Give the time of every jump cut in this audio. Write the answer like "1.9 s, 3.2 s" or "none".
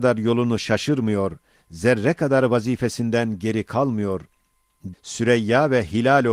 4.9 s